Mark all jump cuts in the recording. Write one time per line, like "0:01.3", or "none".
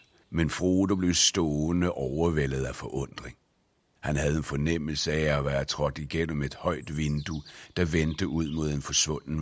none